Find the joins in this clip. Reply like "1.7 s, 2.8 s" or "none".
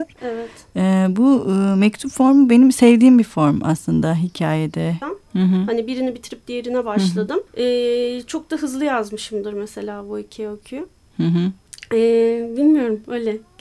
5.0 s, 7.5 s